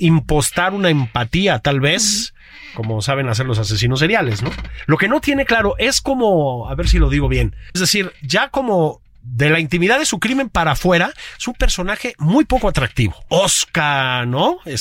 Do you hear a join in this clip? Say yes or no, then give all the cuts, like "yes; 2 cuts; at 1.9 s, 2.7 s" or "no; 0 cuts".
yes; 1 cut; at 7.7 s